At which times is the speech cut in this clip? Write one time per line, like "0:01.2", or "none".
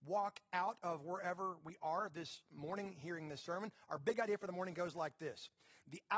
none